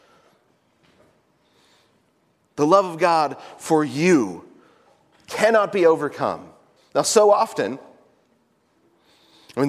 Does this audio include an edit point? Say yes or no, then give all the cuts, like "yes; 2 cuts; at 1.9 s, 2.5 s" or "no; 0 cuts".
yes; 1 cut; at 6.8 s